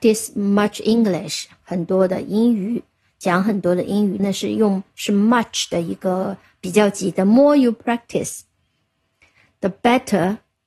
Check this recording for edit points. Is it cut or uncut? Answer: cut